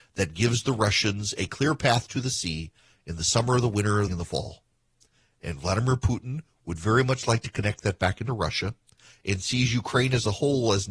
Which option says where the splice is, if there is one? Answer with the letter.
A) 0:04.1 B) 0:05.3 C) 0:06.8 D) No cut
A